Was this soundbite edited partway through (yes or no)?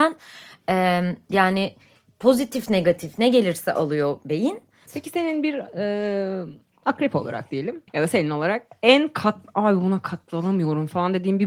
yes